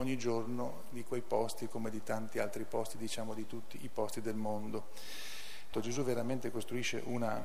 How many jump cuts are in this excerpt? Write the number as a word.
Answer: one